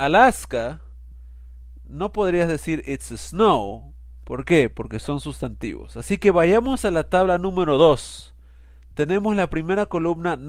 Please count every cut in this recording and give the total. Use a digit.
0